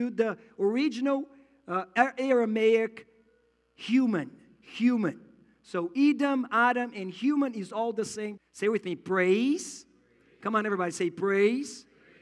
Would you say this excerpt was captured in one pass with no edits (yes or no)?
no